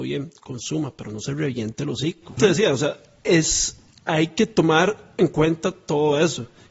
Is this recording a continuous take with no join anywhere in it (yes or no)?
no